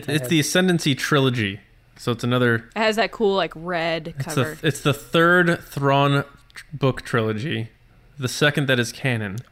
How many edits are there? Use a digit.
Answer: 1